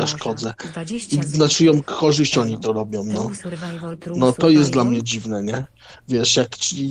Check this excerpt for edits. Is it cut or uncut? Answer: uncut